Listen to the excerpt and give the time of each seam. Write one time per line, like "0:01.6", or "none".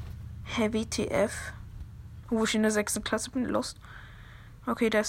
0:02.2